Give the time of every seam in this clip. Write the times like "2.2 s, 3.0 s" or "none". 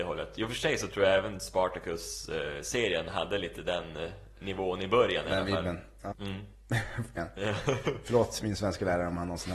6.1 s, 7.2 s